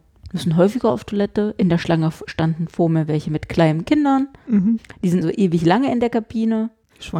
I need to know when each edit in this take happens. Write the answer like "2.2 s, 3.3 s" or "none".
5.2 s